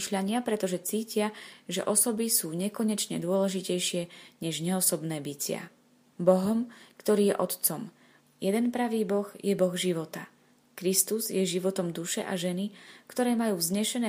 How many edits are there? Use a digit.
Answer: 2